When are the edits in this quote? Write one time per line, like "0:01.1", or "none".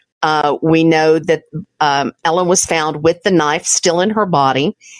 none